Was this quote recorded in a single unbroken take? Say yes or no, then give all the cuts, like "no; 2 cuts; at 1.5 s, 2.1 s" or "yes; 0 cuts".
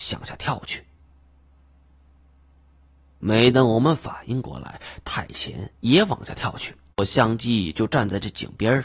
no; 1 cut; at 6.9 s